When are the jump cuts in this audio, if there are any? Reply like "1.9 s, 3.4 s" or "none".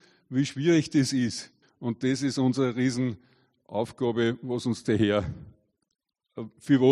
1.6 s